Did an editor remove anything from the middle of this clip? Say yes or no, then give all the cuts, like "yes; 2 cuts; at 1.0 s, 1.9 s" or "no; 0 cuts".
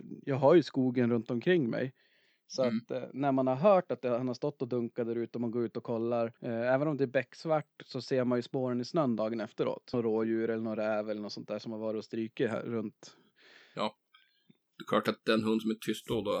yes; 2 cuts; at 6.4 s, 9.9 s